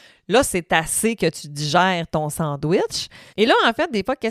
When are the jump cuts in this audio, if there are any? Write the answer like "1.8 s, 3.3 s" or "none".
3.3 s